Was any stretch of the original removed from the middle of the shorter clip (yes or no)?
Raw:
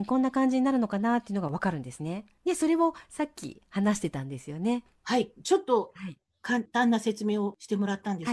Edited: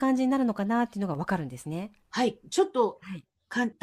yes